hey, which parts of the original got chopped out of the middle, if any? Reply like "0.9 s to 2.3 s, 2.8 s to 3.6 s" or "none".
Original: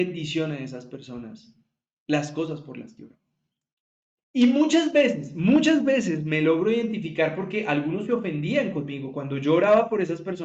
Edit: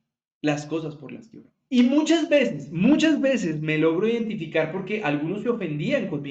3.3 s to 4.3 s